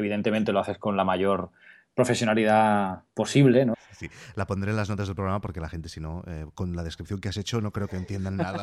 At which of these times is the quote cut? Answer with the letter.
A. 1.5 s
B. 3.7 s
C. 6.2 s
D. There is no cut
B